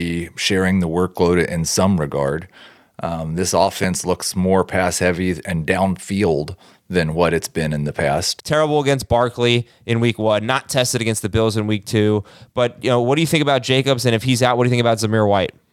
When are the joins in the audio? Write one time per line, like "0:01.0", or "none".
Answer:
0:08.4